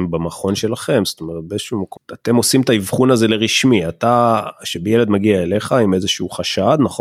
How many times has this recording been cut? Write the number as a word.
one